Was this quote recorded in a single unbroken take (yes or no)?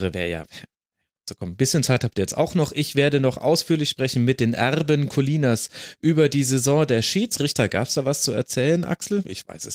yes